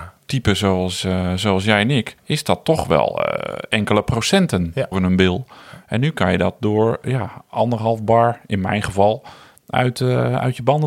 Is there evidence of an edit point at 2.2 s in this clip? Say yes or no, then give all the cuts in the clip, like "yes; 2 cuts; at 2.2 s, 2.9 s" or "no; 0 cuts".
yes; 2 cuts; at 2.2 s, 4.9 s